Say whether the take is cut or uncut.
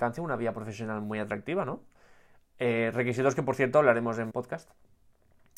cut